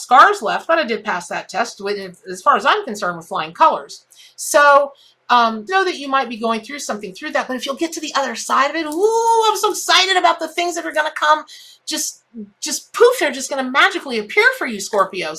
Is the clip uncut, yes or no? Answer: no